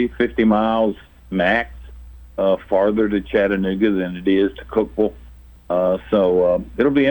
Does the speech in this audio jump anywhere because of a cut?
no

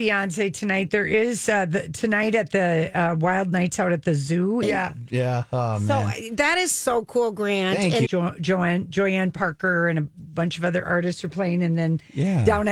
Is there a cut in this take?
yes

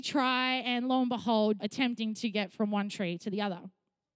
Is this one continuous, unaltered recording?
no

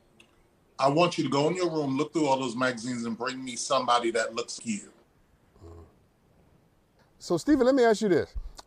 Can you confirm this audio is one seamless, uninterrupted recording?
no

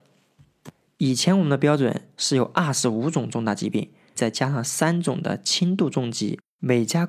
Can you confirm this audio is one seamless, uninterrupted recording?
no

